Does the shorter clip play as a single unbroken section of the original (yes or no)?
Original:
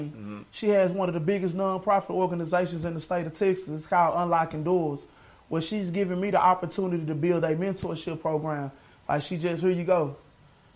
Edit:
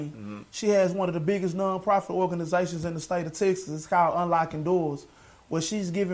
yes